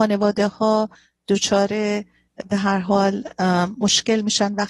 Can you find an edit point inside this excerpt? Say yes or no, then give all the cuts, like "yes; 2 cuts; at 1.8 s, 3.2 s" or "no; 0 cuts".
no; 0 cuts